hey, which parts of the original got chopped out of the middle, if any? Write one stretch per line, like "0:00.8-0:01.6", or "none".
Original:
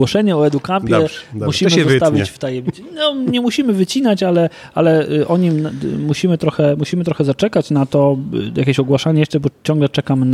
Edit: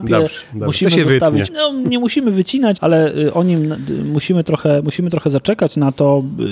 0:02.3-0:02.9
0:04.2-0:04.7

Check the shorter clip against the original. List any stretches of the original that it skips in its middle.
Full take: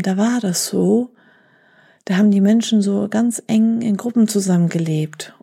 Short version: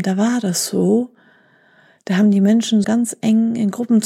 0:02.8-0:03.1

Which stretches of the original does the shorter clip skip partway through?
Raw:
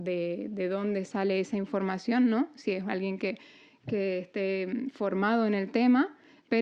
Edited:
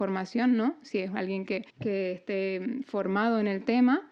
0:03.4-0:03.8

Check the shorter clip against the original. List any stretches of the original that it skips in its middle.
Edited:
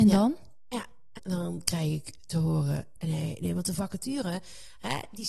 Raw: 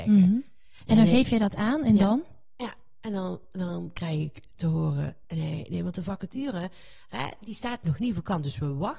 0:03.0-0:03.5

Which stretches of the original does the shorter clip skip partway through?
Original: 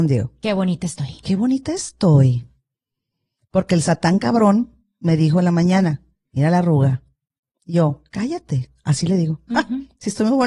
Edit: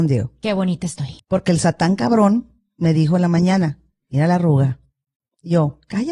0:01.2-0:03.4

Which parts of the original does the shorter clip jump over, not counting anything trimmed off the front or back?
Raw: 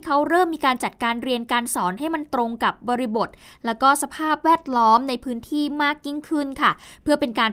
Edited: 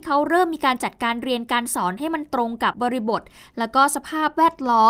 0:02.7-0:02.8

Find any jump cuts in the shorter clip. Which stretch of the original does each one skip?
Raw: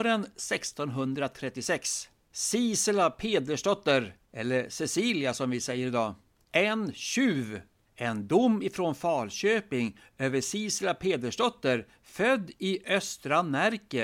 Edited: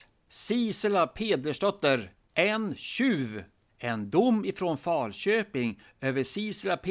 0:04.3-0:06.4

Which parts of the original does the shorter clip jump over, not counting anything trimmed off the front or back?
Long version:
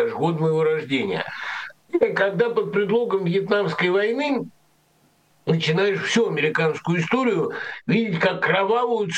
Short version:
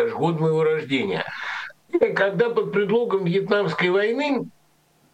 none

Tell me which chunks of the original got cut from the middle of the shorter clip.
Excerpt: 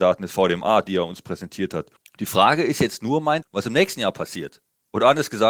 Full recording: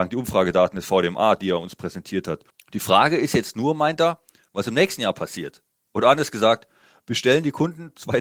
0:04.0-0:04.4

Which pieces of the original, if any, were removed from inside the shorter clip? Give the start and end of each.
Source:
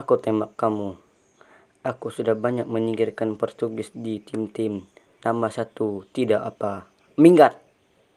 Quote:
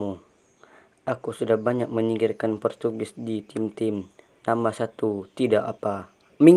none

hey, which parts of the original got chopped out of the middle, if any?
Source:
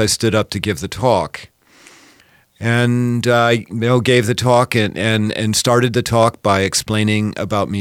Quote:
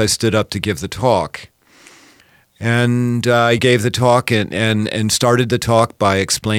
0:03.6-0:04.0

